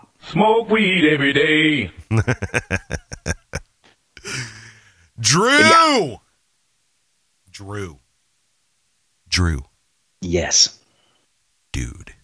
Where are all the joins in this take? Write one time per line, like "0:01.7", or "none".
none